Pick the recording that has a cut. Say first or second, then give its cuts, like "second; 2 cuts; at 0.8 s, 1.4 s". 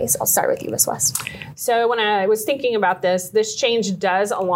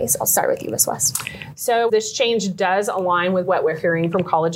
second; 1 cut; at 1.9 s